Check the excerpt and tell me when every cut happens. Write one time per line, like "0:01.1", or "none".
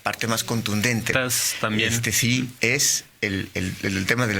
0:01.1
0:02.6